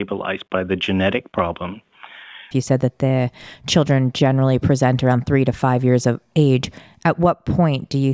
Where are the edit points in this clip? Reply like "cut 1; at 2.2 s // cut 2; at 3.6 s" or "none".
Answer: cut 1; at 2.5 s